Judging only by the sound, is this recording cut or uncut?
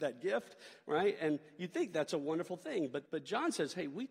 cut